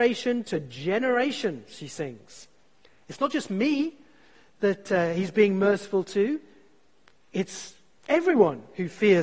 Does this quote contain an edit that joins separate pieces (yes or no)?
no